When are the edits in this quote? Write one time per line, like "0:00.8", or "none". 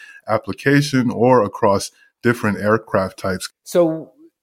0:03.5